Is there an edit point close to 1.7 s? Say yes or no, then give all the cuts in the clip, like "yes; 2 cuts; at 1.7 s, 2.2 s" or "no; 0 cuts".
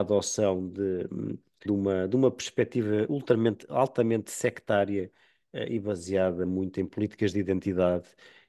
yes; 1 cut; at 1.7 s